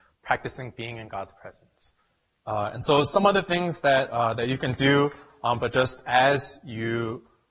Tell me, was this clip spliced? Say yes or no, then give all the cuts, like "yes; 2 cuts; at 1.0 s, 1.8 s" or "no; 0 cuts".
yes; 2 cuts; at 2.3 s, 5.6 s